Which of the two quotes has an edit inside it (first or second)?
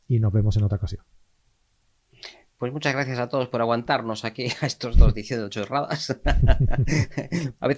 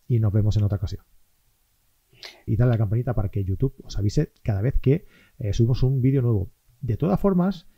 second